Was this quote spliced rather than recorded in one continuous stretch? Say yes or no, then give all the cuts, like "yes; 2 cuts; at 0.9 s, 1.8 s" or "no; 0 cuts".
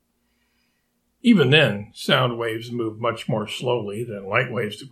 yes; 1 cut; at 1.1 s